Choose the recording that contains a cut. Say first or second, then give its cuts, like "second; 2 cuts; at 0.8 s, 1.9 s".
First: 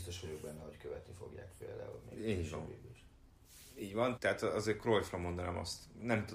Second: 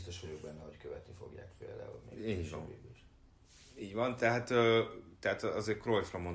first; 1 cut; at 4.2 s